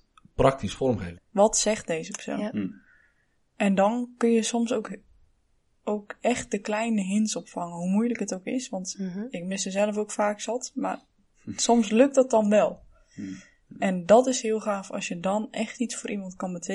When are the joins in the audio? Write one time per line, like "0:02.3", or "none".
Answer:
0:01.2